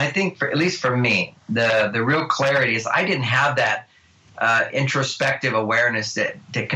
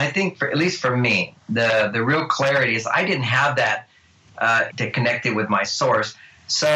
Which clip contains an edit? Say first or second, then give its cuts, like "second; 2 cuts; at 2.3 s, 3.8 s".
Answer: second; 1 cut; at 4.7 s